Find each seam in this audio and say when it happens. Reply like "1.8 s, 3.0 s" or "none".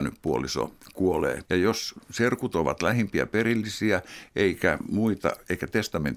1.4 s